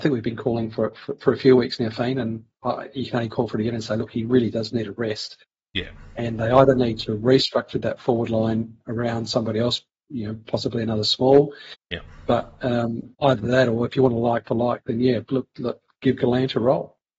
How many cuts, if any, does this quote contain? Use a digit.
2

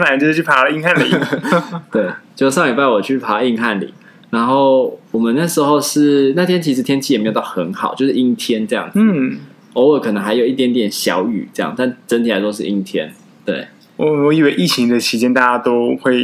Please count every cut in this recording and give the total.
2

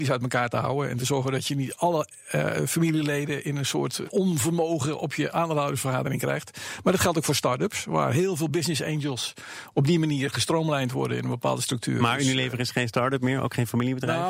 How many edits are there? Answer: 1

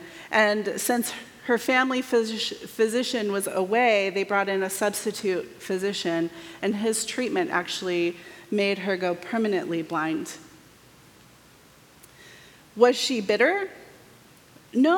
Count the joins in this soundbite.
0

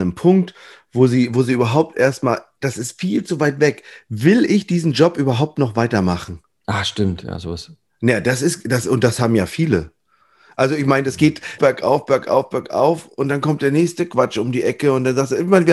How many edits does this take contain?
1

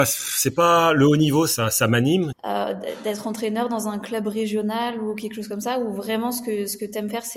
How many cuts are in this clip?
1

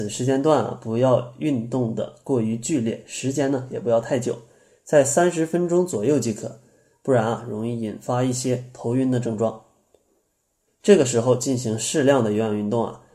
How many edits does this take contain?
1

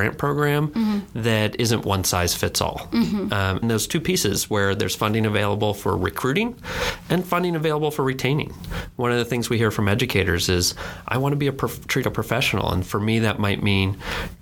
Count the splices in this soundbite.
2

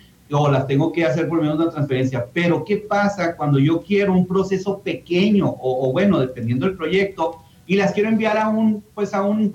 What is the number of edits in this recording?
0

